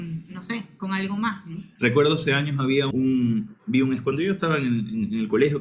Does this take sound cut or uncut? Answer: cut